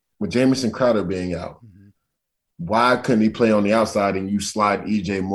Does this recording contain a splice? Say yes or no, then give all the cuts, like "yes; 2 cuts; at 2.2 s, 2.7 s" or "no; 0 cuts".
no; 0 cuts